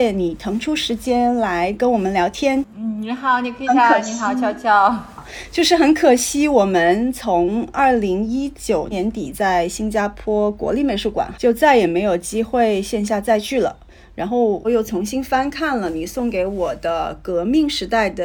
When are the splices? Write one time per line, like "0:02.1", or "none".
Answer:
0:08.9
0:11.3
0:14.6